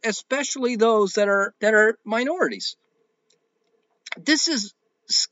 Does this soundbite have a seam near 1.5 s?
yes; 1 cut; at 1.5 s

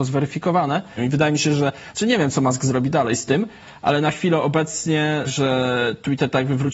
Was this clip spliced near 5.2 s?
yes; 2 cuts; at 1.0 s, 5.2 s

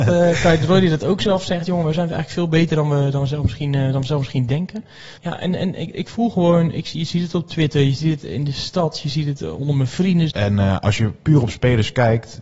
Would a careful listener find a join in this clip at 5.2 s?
yes; 2 cuts; at 5.2 s, 10.3 s

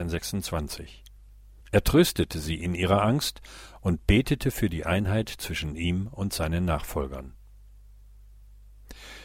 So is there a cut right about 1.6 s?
yes; 1 cut; at 1.6 s

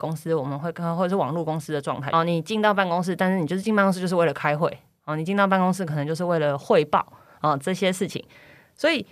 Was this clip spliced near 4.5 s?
no; 1 cut; at 2.1 s

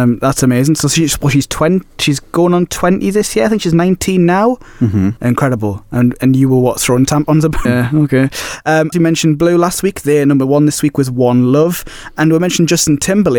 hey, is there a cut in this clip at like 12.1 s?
no; 3 cuts; at 5.2 s, 7.7 s, 8.9 s

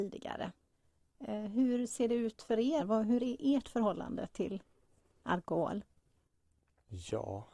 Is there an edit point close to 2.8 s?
yes; 1 cut; at 2.8 s

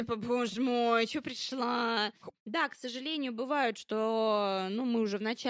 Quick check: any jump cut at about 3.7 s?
no; 1 cut; at 2.3 s

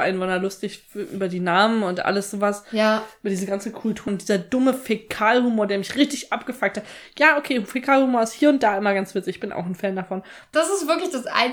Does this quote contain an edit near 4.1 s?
yes; 2 cuts; at 4.1 s, 10.5 s

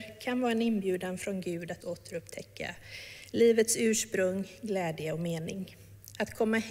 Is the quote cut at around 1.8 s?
yes; 1 cut; at 1.8 s

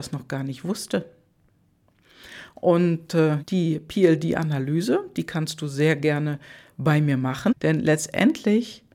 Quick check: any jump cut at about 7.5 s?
yes; 2 cuts; at 3.4 s, 7.5 s

